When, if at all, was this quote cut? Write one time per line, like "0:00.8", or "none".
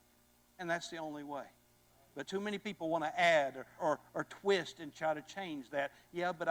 0:03.8

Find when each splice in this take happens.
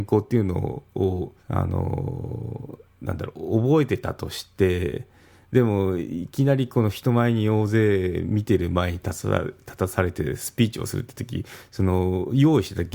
0:01.4

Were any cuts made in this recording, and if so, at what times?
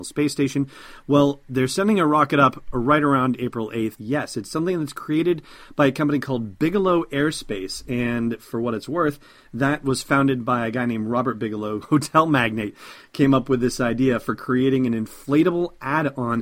0:03.9
0:11.8

